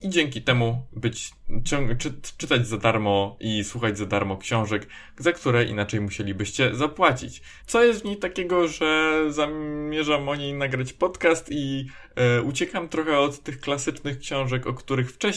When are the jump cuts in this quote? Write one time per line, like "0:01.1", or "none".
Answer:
0:07.6